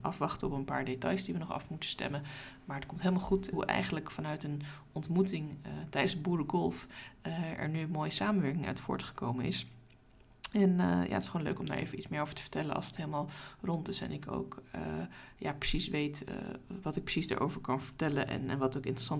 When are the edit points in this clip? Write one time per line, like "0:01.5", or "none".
0:03.5